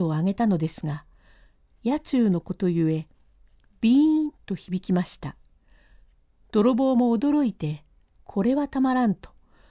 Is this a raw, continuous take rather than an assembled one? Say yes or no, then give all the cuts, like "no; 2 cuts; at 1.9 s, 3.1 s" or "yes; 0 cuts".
yes; 0 cuts